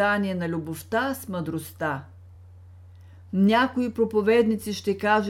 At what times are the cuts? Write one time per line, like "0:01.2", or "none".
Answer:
none